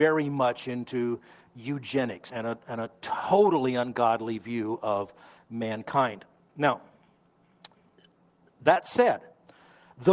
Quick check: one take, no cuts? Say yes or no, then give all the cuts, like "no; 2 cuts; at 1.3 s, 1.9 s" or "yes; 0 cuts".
no; 1 cut; at 2.3 s